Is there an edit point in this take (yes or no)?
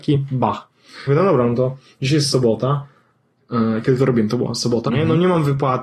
yes